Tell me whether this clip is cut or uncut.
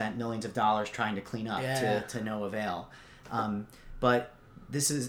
uncut